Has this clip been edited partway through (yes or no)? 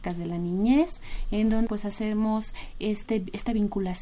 yes